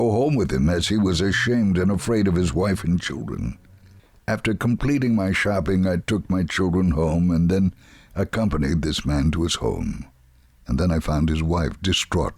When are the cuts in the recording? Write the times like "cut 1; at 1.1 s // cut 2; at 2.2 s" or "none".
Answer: none